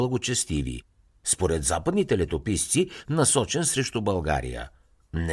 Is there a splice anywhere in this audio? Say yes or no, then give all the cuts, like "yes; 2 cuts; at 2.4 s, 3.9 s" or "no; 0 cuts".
yes; 1 cut; at 3.0 s